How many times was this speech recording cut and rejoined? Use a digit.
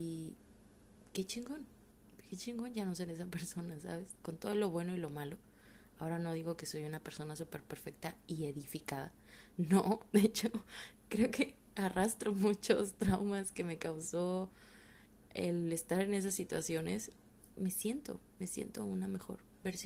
1